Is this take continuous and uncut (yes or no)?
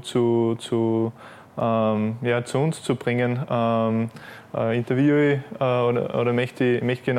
yes